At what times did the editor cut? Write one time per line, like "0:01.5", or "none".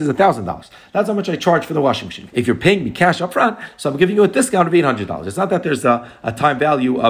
0:02.3